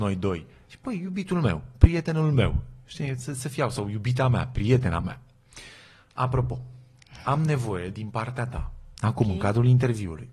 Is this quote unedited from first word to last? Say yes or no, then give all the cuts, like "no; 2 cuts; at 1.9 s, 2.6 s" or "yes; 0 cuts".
yes; 0 cuts